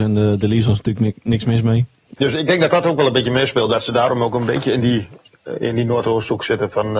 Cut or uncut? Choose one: cut